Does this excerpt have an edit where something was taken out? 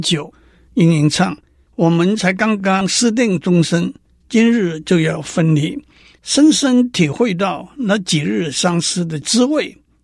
no; 0 cuts

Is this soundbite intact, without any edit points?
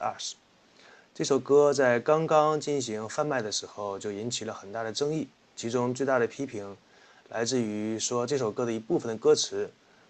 yes; 0 cuts

